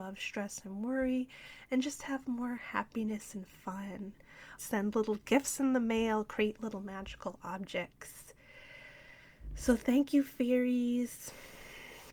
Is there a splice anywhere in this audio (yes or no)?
yes